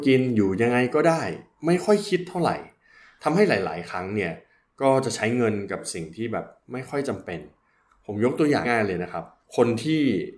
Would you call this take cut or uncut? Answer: cut